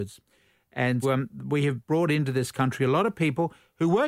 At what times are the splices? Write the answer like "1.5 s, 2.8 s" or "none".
1.0 s